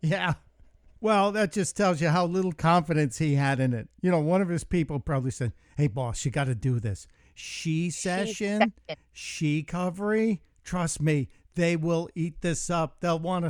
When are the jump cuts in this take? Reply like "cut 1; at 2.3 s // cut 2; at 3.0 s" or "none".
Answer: cut 1; at 1.0 s